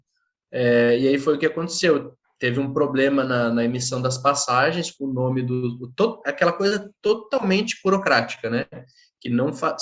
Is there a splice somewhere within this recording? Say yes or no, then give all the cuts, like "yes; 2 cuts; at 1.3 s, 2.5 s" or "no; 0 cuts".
no; 0 cuts